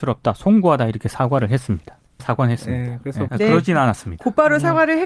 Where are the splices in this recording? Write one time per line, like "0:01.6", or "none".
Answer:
0:02.2
0:03.3

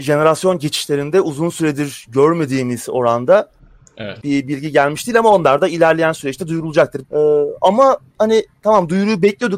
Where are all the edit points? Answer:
0:04.2
0:07.0

